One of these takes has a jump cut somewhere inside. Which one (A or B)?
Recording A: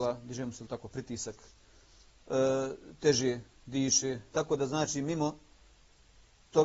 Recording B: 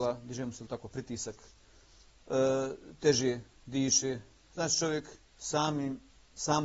A